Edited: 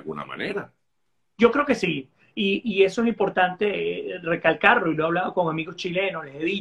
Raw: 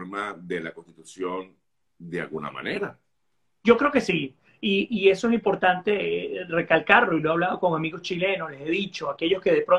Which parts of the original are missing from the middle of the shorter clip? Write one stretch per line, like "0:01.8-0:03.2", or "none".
none